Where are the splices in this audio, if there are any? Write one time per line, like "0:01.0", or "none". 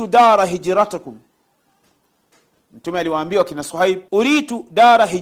0:04.1